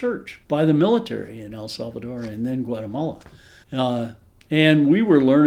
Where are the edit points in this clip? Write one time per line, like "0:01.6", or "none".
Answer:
0:03.6